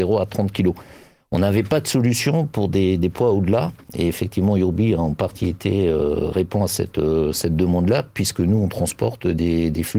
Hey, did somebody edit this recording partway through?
no; 0 cuts

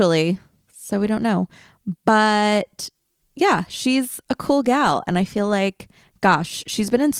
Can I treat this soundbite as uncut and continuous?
yes; 0 cuts

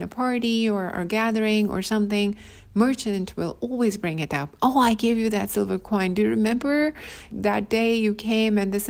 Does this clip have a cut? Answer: yes; 1 cut; at 7.3 s

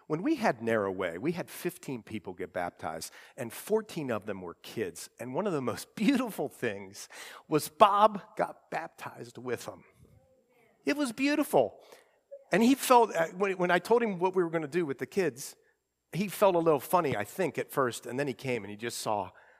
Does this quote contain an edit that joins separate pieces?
no; 0 cuts

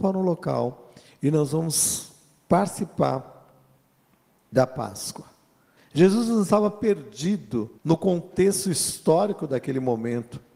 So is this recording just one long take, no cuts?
no; 2 cuts; at 5.8 s, 7.8 s

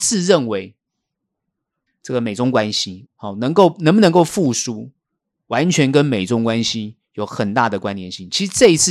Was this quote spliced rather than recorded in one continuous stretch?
yes; 2 cuts; at 1.9 s, 3.0 s

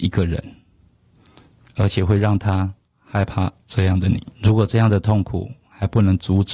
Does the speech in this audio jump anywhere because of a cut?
yes; 1 cut; at 4.3 s

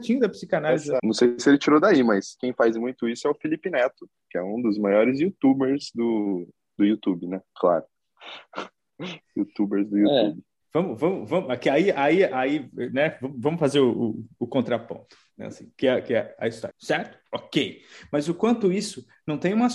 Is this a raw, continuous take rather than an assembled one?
no; 3 cuts; at 1.0 s, 10.6 s, 16.7 s

